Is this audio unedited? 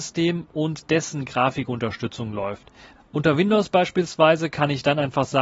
no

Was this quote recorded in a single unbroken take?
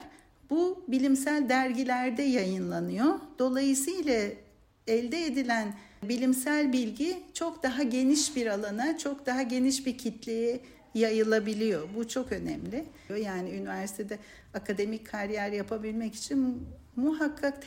no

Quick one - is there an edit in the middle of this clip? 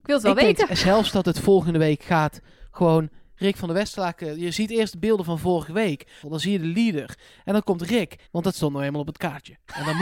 yes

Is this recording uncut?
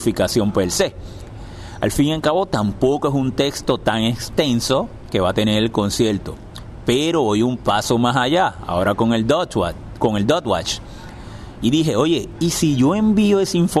no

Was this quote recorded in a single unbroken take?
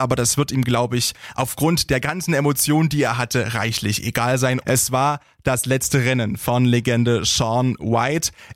no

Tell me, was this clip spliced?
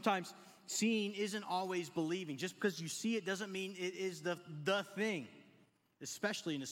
no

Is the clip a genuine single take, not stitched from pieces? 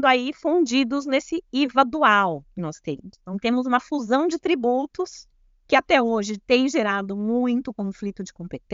yes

